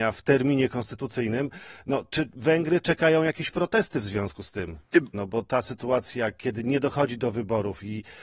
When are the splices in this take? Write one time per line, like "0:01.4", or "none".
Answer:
0:05.1